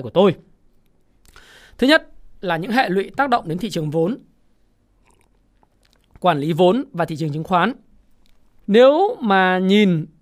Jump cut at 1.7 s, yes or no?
no